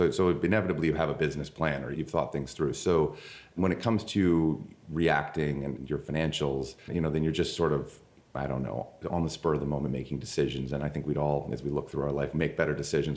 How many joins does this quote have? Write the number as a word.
one